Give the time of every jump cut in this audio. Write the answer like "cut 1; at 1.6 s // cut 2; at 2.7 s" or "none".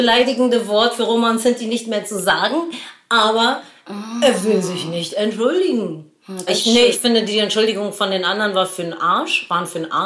cut 1; at 6.5 s